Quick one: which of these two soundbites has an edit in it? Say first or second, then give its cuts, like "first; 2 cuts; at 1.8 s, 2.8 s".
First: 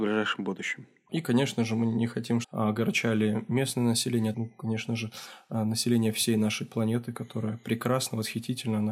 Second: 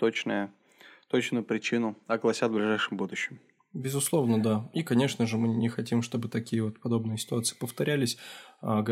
first; 3 cuts; at 1.1 s, 2.4 s, 4.3 s